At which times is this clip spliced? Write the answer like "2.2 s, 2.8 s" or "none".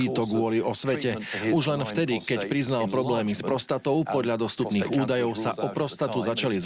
none